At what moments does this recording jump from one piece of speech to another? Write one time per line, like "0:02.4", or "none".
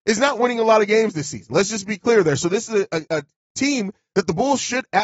0:03.1